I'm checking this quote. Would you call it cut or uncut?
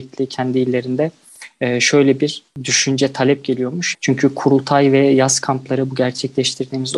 cut